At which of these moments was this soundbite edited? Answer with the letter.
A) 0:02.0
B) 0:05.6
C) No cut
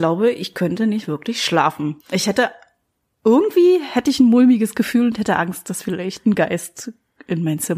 A